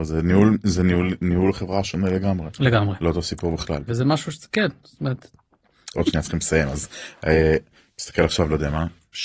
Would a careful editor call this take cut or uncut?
cut